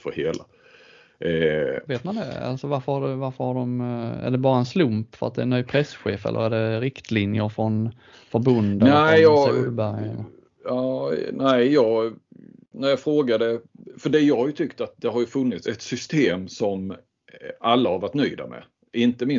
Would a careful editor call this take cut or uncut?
cut